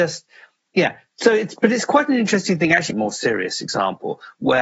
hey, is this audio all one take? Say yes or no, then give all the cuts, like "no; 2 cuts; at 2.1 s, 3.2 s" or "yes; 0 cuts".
no; 1 cut; at 2.9 s